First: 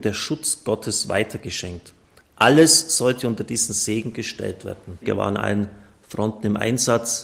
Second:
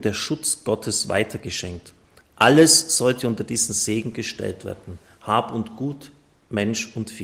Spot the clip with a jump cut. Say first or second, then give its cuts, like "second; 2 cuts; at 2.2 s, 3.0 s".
first; 1 cut; at 5.0 s